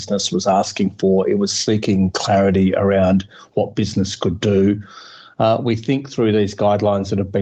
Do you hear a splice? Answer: no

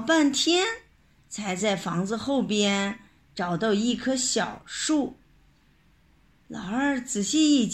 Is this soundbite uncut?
yes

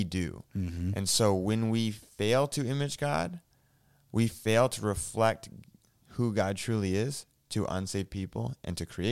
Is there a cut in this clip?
no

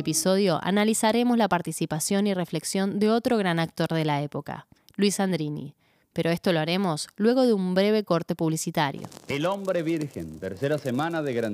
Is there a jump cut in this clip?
no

